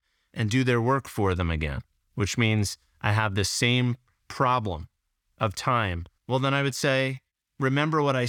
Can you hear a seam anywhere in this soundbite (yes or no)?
yes